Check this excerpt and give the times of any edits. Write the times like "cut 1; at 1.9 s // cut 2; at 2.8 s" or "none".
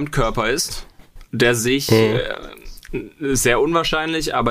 none

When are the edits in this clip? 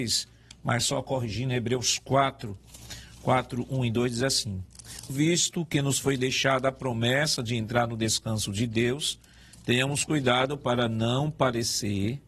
cut 1; at 5.1 s

